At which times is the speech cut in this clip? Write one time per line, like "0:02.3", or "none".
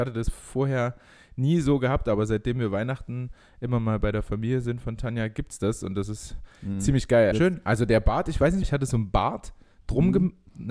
0:07.3
0:08.6